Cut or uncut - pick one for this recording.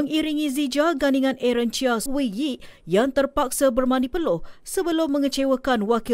cut